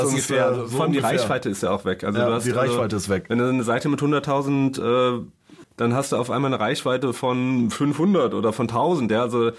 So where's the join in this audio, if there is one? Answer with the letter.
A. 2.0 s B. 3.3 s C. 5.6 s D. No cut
C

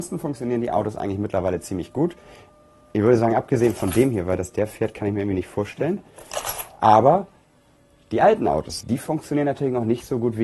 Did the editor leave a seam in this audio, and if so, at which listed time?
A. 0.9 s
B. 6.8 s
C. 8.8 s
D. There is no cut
C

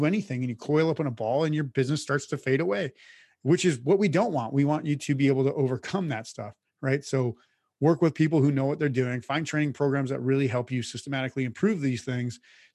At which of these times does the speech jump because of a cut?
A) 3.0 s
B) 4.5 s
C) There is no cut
C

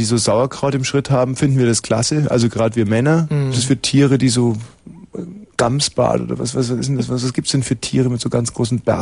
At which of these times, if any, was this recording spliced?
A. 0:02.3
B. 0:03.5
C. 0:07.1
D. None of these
B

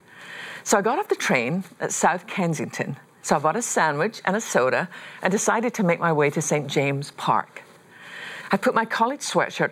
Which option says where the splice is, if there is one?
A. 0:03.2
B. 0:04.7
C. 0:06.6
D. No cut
A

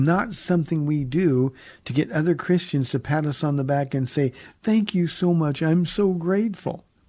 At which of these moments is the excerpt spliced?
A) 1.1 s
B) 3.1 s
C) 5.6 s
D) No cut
D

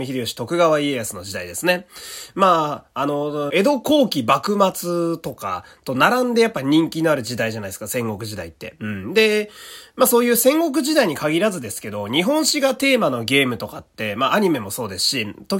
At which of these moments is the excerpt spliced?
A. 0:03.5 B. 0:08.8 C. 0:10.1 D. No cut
A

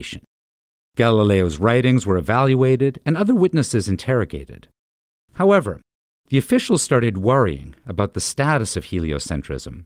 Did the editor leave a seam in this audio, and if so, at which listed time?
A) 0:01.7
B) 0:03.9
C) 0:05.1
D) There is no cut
C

